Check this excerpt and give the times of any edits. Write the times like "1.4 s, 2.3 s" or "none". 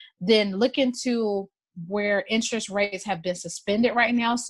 none